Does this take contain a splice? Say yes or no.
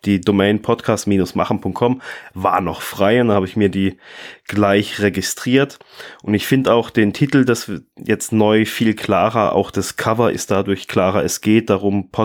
no